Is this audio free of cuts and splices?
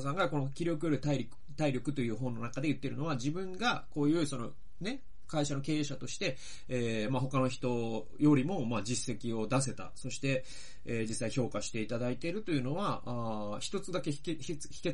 yes; 0 cuts

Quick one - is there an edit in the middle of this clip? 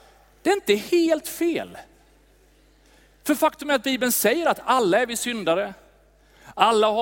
no; 0 cuts

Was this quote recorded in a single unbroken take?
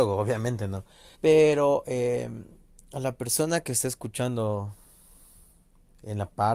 no; 1 cut; at 1.1 s

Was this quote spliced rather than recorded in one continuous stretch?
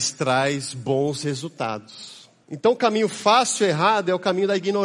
yes; 1 cut; at 2.4 s

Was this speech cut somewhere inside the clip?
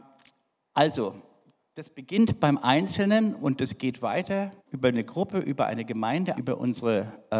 yes; 2 cuts; at 4.6 s, 6.4 s

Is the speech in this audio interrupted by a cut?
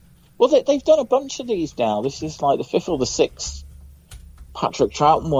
no; 0 cuts

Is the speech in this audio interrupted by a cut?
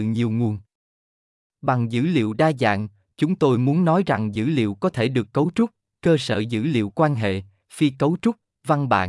no; 0 cuts

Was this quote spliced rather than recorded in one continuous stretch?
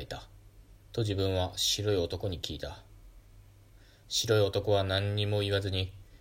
yes; 2 cuts; at 0.9 s, 4.0 s

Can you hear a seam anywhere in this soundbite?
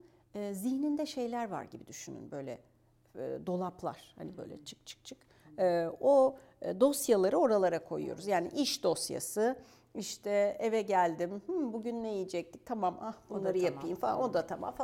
no; 0 cuts

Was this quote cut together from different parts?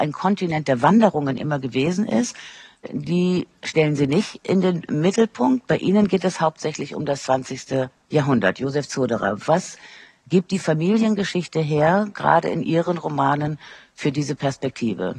no; 0 cuts

